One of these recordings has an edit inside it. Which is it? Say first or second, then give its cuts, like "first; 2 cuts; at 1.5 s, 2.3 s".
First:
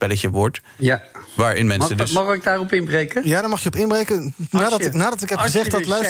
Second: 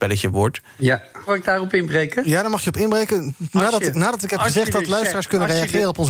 second; 1 cut; at 1.3 s